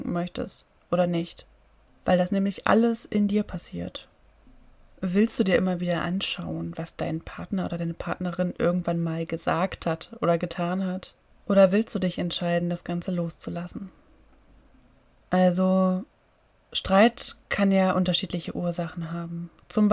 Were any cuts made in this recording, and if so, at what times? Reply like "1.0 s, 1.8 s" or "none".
15.2 s, 17.4 s